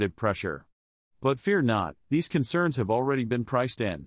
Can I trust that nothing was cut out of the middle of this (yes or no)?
no